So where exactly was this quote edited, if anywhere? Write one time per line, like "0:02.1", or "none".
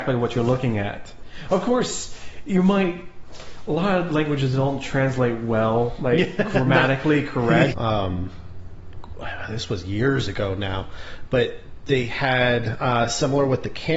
0:07.7